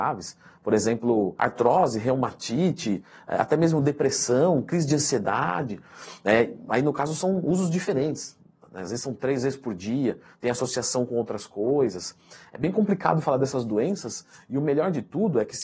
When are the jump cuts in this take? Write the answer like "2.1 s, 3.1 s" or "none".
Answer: 10.3 s